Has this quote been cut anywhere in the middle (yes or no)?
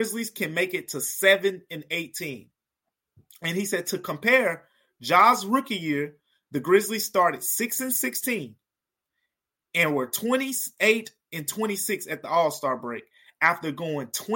no